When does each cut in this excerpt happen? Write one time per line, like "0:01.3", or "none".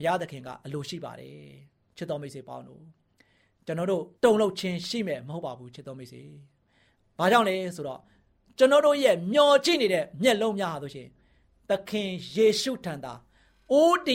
0:04.1